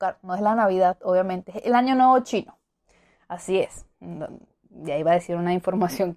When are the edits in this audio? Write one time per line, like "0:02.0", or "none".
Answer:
none

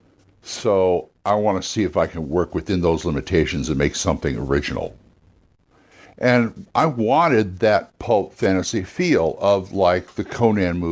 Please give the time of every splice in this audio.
none

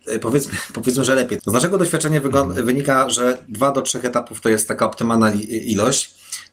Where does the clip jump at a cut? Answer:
0:01.4

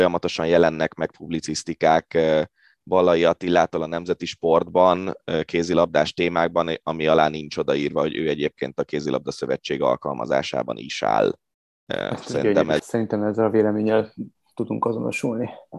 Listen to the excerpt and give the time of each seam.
0:12.8

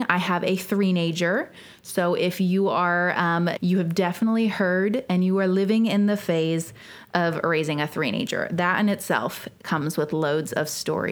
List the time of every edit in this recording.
0:03.6

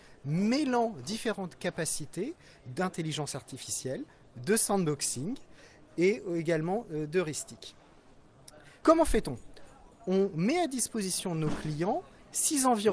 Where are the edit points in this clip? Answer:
0:08.8

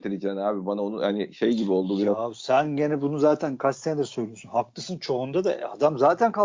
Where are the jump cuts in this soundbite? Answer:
none

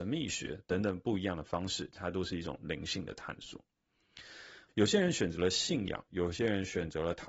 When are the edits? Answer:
0:04.7
0:06.1

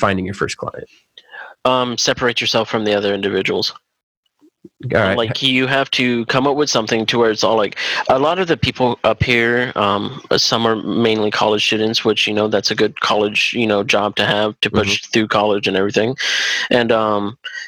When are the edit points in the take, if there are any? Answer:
none

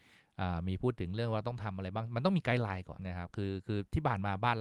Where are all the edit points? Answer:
0:03.0

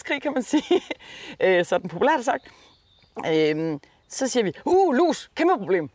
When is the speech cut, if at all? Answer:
none

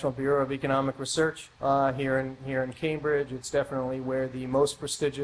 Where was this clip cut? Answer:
0:01.5

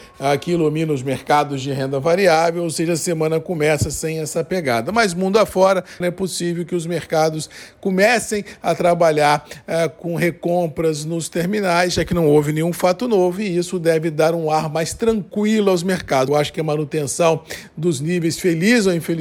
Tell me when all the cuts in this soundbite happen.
0:06.0
0:16.3

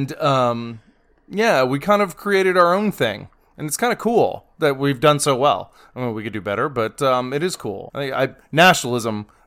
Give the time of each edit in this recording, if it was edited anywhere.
0:07.9

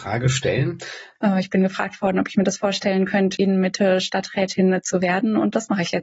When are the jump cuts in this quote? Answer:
0:01.2
0:03.4

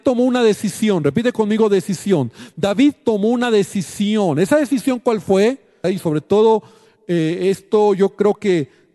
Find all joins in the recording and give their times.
0:05.8

